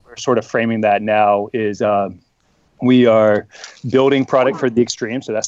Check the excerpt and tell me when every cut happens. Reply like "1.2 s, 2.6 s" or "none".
none